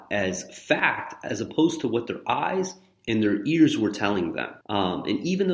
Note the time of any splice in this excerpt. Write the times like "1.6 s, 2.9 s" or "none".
4.6 s